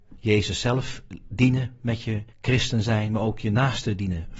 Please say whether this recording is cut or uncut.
cut